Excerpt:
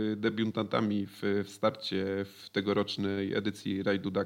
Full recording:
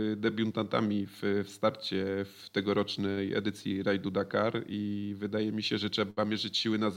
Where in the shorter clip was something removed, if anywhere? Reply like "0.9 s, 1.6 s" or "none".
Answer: none